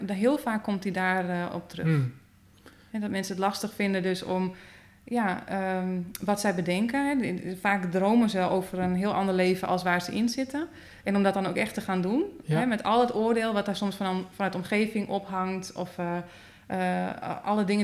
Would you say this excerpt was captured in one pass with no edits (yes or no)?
yes